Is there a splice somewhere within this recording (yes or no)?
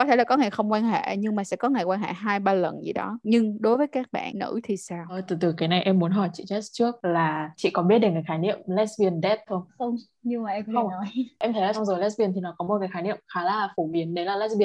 yes